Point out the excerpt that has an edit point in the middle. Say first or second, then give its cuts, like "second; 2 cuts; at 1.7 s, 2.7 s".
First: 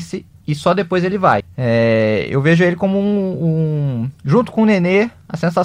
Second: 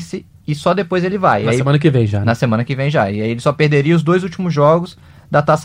first; 1 cut; at 1.4 s